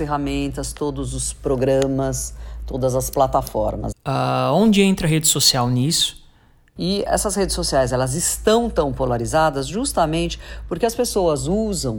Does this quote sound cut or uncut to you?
cut